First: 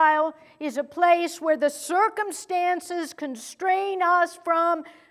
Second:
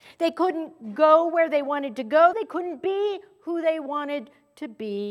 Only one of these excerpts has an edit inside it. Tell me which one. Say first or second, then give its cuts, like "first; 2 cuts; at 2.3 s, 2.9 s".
second; 1 cut; at 2.3 s